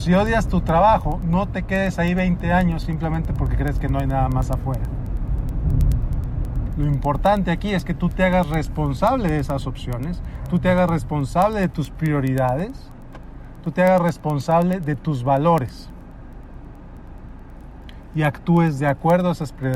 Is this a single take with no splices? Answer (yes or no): no